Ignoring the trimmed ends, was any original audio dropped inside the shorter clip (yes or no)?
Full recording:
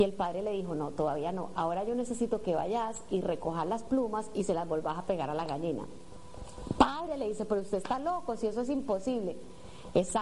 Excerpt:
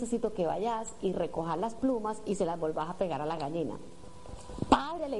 no